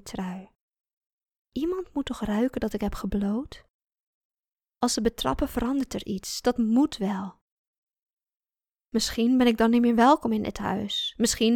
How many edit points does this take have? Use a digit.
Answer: 0